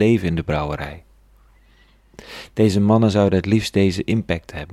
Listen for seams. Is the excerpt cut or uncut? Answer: uncut